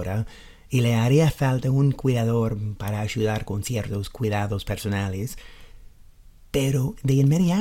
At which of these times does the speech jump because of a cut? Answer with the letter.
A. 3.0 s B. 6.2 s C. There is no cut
C